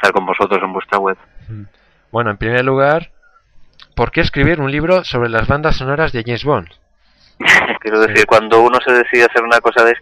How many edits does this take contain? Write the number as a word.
one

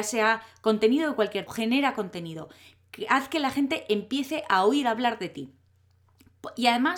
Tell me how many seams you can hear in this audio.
one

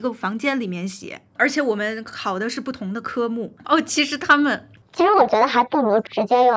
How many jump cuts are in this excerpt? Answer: two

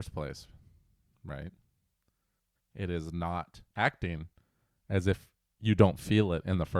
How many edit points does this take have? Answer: two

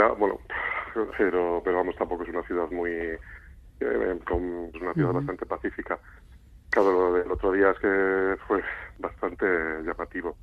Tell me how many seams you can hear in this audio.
two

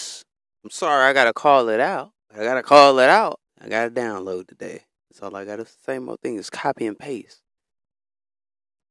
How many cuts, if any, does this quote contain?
three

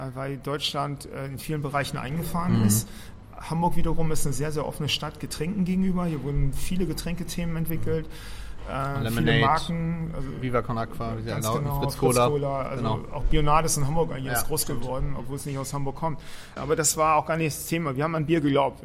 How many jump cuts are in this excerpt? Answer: one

